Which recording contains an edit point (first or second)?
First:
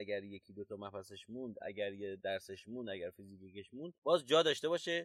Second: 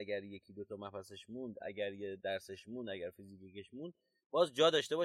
first